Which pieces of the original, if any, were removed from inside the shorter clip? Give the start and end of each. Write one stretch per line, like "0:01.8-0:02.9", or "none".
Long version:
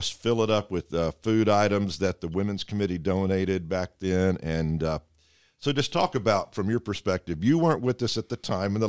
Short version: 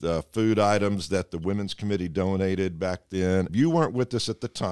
0:04.4-0:07.4